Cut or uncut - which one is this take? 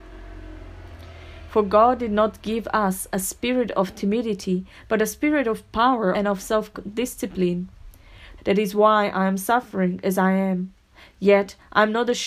cut